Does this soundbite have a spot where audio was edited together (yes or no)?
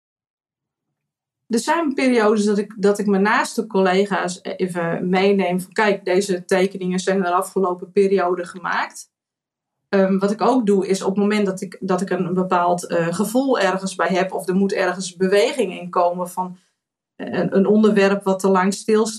no